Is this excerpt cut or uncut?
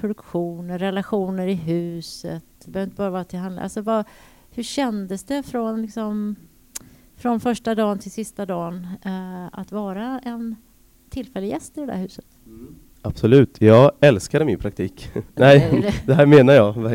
cut